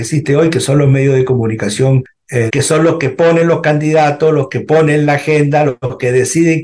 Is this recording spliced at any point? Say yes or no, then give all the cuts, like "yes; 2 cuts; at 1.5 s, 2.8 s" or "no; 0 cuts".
yes; 1 cut; at 2.5 s